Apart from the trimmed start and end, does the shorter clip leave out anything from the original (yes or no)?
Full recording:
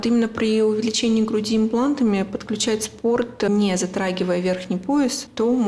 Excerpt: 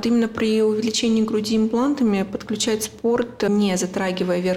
no